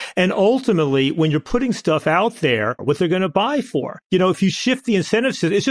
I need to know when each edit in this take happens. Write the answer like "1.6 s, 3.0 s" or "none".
2.8 s